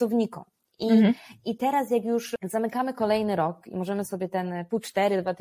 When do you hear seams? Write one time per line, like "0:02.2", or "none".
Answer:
none